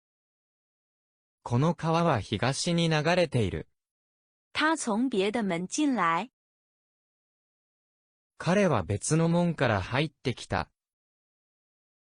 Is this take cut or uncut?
cut